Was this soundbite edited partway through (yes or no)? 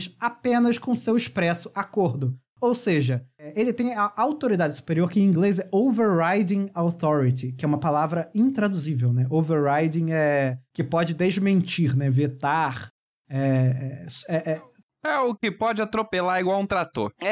no